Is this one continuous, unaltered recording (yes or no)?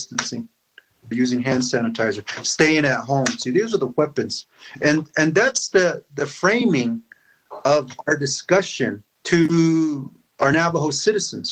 no